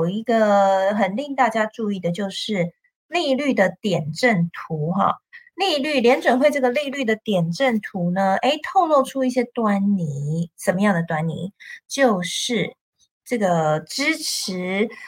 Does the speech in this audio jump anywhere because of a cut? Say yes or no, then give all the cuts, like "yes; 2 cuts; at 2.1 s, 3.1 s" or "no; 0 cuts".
no; 0 cuts